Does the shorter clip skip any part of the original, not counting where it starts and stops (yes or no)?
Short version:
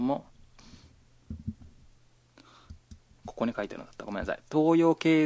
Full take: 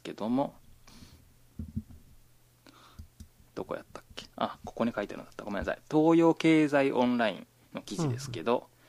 yes